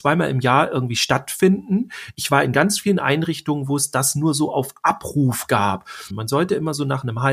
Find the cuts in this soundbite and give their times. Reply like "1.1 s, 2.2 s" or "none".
6.1 s